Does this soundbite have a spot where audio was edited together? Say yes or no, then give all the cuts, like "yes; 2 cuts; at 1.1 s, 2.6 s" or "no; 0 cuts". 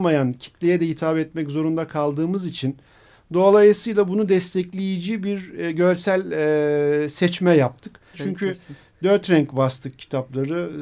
yes; 1 cut; at 8.1 s